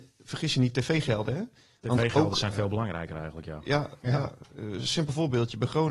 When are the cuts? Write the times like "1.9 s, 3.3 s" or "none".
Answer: none